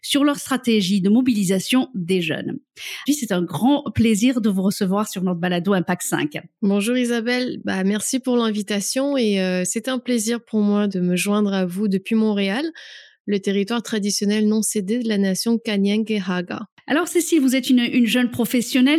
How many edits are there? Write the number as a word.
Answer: two